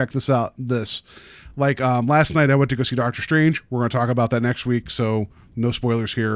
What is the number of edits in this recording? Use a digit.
0